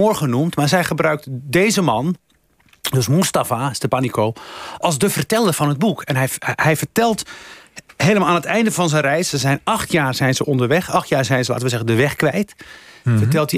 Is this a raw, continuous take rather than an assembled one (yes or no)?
no